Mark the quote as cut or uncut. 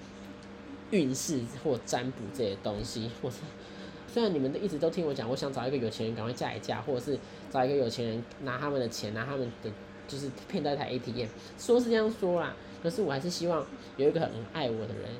cut